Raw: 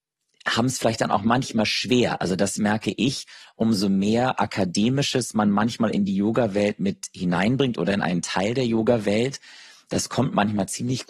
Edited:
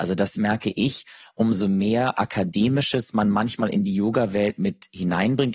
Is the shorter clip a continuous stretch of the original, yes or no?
yes